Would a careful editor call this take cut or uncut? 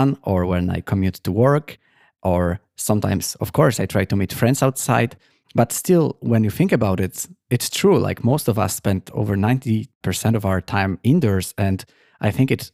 uncut